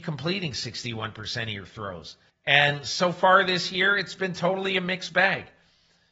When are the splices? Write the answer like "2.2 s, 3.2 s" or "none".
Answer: 2.3 s